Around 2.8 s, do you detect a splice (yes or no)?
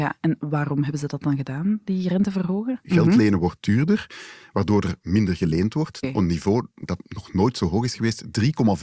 yes